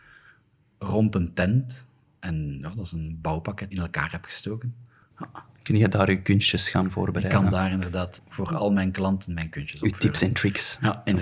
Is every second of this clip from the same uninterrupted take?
no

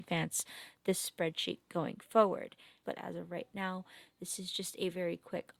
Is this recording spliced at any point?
yes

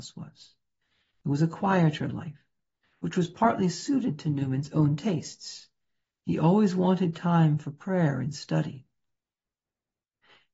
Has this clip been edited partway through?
no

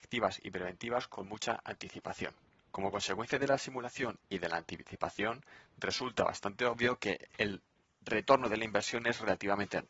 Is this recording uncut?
no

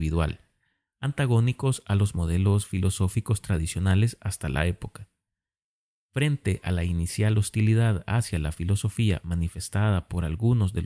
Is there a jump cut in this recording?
no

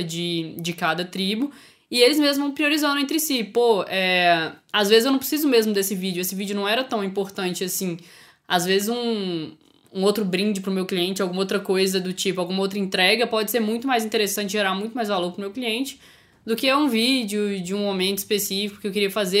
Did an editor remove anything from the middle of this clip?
no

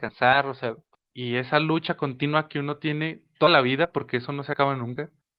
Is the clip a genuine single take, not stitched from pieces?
no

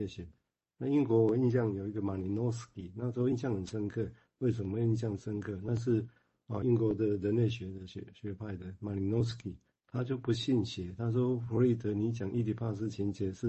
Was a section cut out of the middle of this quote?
yes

